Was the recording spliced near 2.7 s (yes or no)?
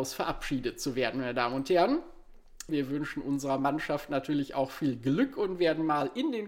yes